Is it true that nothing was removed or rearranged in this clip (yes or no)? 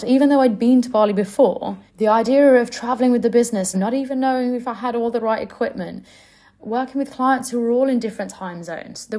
no